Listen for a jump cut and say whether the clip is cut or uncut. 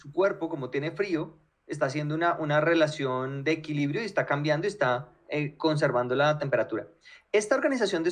uncut